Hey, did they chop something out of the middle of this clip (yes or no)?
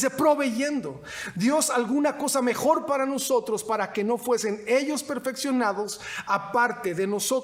no